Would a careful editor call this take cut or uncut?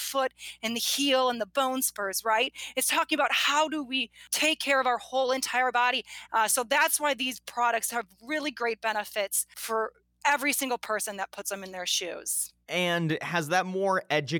cut